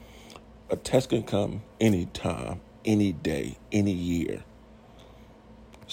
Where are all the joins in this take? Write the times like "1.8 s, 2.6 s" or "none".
none